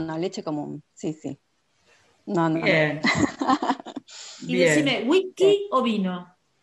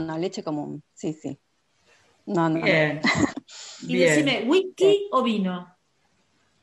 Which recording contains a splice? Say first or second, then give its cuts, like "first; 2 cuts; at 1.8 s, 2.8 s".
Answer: second; 1 cut; at 3.3 s